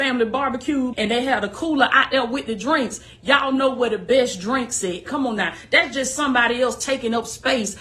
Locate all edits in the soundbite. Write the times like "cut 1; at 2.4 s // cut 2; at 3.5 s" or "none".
cut 1; at 0.9 s // cut 2; at 5.1 s